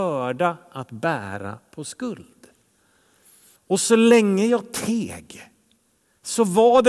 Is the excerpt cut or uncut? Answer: cut